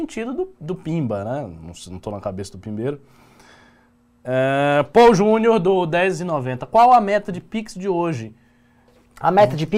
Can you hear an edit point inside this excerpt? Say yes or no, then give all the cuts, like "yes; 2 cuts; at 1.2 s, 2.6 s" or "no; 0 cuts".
no; 0 cuts